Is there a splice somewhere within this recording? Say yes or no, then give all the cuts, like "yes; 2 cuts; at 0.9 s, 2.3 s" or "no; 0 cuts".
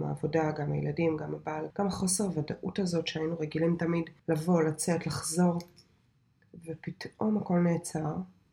yes; 2 cuts; at 1.7 s, 4.2 s